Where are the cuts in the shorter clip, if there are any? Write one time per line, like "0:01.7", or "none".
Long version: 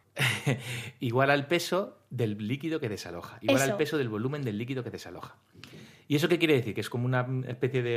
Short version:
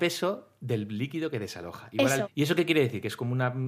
0:02.2